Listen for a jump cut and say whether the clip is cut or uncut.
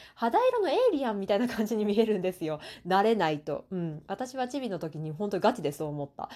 uncut